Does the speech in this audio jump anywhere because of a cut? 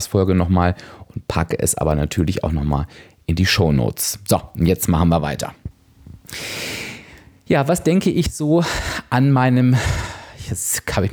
no; 0 cuts

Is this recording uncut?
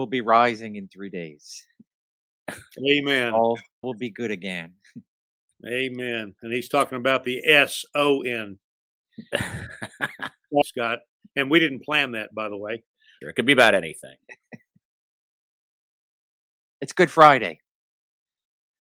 no; 3 cuts; at 3.8 s, 10.6 s, 13.2 s

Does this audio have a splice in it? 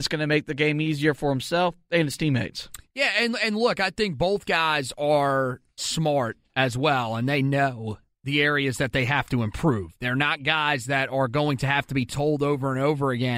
yes; 1 cut; at 5.8 s

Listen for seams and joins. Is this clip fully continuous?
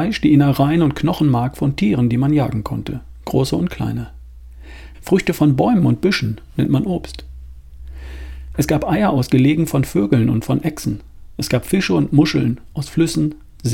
no; 1 cut; at 4.9 s

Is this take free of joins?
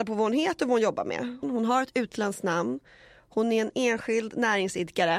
no; 1 cut; at 1.4 s

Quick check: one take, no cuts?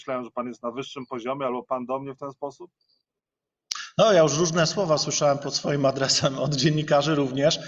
yes; 0 cuts

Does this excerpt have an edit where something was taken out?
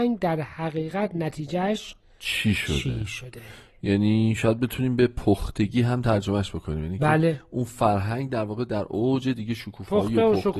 no; 0 cuts

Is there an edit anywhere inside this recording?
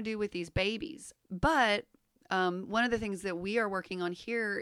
yes; 1 cut; at 1.2 s

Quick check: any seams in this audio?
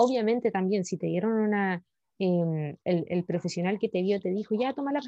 no; 0 cuts

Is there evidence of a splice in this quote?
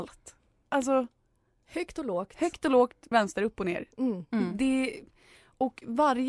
yes; 1 cut; at 3.1 s

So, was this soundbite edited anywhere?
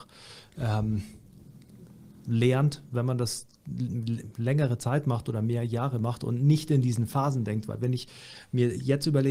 no; 0 cuts

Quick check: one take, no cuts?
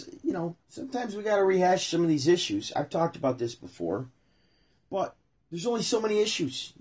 yes; 0 cuts

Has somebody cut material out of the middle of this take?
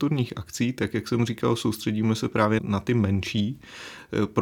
yes; 1 cut; at 2.6 s

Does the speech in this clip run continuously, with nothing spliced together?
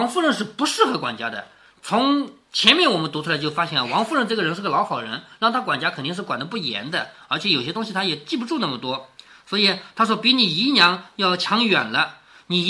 yes; 0 cuts

